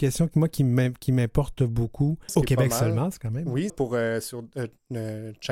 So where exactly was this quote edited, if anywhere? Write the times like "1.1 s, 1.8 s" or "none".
2.3 s, 3.7 s